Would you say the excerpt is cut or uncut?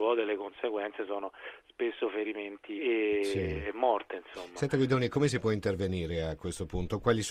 cut